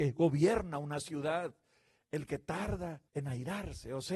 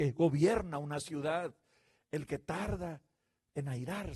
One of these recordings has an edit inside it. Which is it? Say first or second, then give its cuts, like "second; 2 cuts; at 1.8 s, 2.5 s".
first; 1 cut; at 3.1 s